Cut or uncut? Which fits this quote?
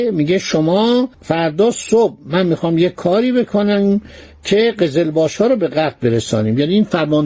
cut